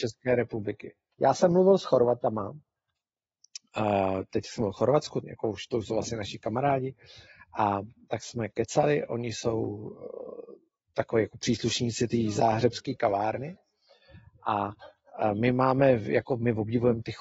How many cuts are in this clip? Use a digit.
2